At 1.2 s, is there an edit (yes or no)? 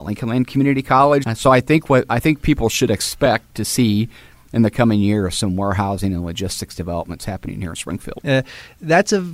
yes